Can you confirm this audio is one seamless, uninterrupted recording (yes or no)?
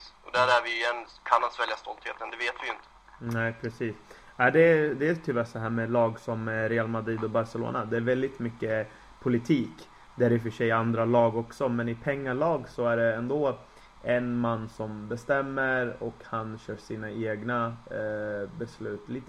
yes